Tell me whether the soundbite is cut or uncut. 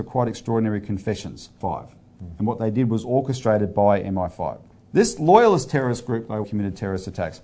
cut